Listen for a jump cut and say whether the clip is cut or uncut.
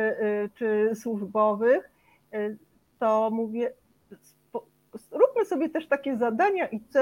uncut